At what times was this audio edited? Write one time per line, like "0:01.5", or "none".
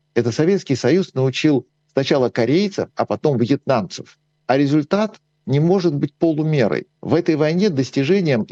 0:04.4
0:06.9